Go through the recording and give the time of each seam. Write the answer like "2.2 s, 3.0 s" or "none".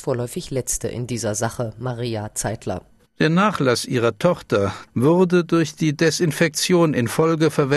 3.0 s